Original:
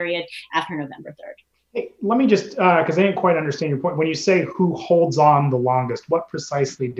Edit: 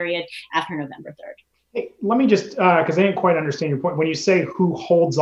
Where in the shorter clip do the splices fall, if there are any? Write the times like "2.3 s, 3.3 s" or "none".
none